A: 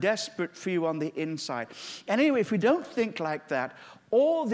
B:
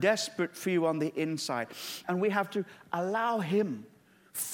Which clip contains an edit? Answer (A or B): B